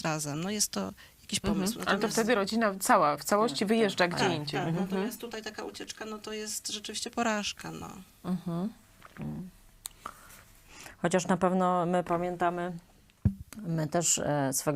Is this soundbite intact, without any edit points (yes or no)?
yes